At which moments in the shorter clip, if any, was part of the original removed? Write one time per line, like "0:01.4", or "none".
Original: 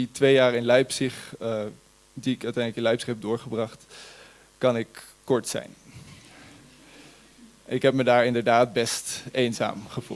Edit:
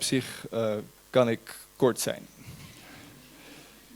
0:01.0

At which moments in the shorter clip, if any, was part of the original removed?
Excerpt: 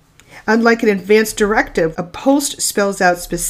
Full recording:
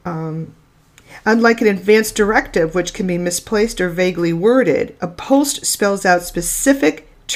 0:01.9

